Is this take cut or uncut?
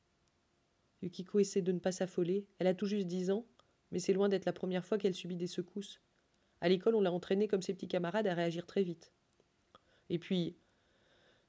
uncut